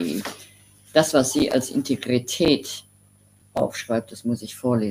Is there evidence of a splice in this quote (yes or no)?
no